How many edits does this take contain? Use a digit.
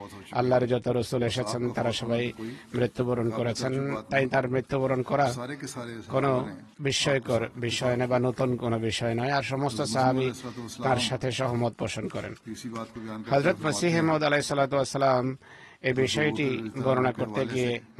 1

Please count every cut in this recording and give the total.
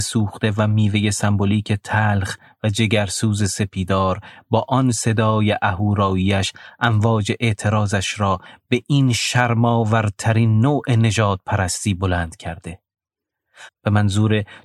1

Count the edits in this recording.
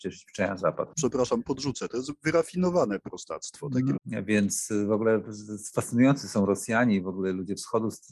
2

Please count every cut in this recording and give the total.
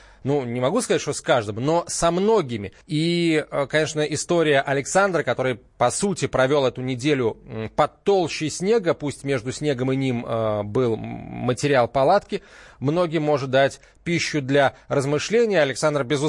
1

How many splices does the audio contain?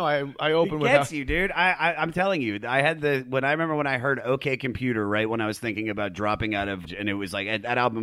1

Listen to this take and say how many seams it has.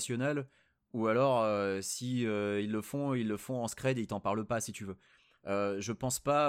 0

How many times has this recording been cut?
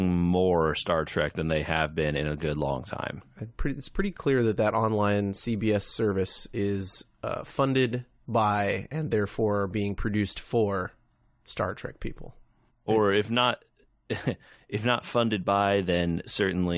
1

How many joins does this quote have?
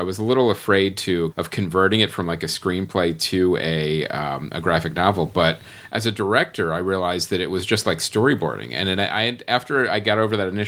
1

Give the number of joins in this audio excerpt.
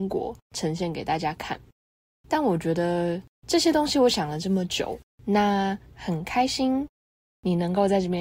1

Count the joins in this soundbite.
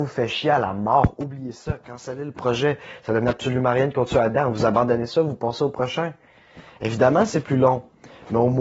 0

